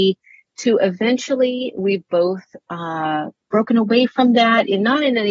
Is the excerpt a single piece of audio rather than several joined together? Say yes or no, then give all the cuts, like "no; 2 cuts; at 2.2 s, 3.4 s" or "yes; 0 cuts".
yes; 0 cuts